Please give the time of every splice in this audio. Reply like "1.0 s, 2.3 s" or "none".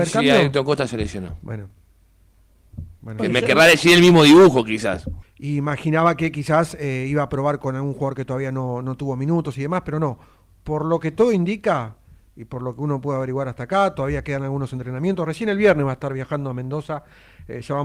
5.2 s